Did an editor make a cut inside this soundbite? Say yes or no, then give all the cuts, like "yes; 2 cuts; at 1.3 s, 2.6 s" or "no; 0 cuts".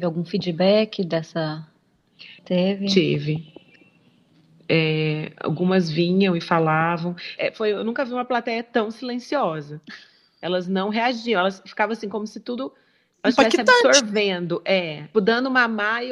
yes; 3 cuts; at 2.4 s, 7.4 s, 15.1 s